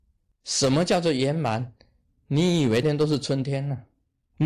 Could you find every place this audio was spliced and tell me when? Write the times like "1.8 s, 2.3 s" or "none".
2.8 s